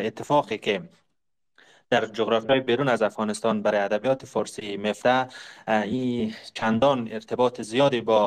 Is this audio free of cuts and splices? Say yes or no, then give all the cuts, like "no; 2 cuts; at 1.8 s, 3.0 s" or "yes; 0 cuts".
yes; 0 cuts